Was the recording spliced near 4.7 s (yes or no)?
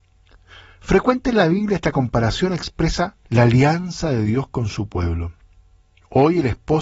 no